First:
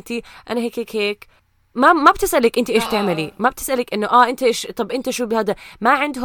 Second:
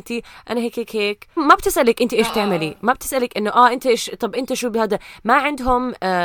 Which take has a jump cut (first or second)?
second